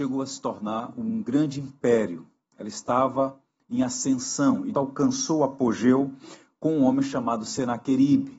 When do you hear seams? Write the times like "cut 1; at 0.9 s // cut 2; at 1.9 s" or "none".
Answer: cut 1; at 4.7 s